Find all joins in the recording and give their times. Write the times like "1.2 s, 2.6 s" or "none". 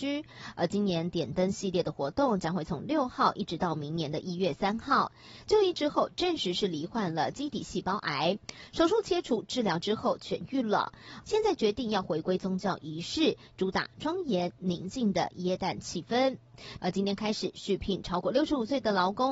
5.4 s, 11.2 s, 16.8 s